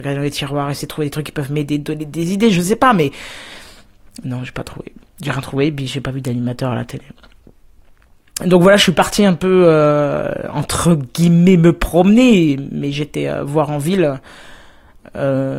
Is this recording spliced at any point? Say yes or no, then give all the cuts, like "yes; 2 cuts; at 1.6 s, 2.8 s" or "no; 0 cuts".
no; 0 cuts